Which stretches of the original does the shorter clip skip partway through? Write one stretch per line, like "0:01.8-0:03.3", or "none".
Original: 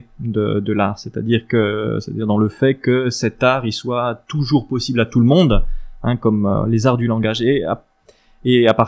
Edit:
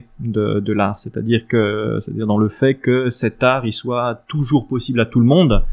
none

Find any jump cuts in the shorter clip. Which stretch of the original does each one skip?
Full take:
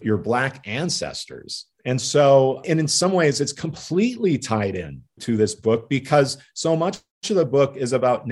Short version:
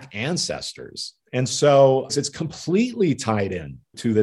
0:02.6-0:03.3

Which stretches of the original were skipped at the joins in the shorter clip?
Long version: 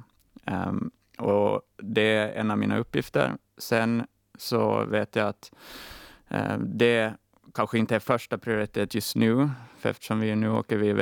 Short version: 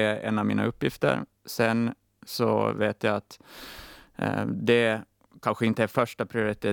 none

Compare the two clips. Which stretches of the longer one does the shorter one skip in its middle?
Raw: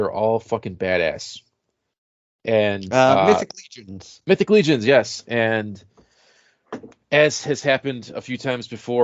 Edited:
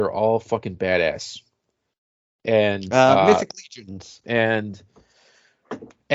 0:04.2-0:05.3

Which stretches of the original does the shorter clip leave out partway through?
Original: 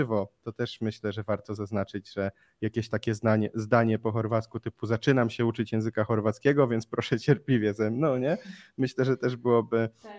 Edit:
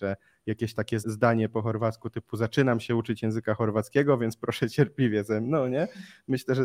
0:03.2-0:03.5

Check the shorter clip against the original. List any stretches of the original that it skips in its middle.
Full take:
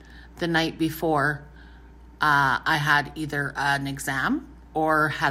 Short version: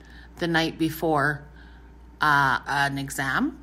0:02.6-0:03.5

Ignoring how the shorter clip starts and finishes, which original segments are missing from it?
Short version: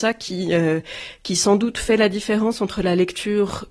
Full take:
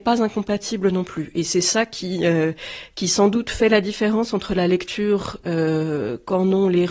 none

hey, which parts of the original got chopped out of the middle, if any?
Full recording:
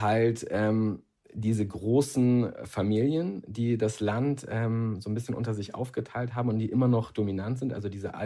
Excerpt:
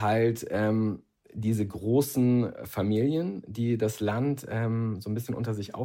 none

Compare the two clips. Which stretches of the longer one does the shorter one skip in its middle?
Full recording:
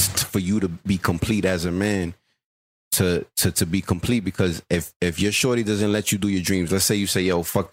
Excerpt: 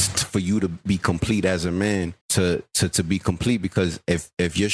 0:02.2-0:02.8

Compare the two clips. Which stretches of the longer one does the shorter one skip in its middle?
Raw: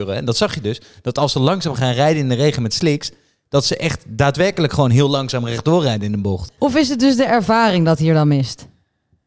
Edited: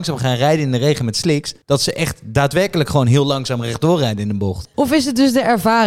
0:03.2-0:03.5

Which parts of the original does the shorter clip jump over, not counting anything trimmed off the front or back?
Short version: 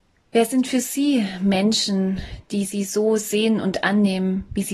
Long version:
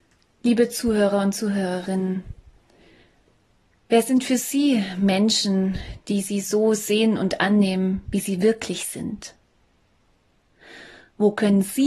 none

